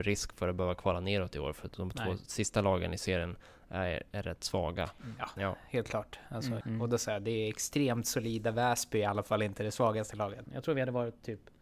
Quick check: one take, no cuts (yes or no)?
no